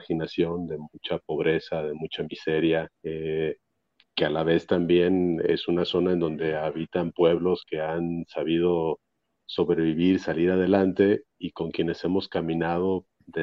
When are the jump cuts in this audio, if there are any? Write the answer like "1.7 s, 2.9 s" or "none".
2.9 s